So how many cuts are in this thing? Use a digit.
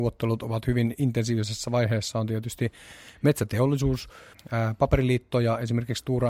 1